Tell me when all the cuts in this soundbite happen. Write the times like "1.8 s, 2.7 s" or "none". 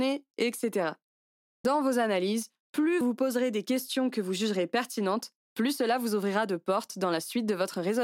3.0 s